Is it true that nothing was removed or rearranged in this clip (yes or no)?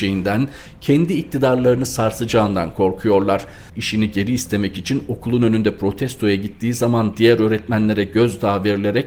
no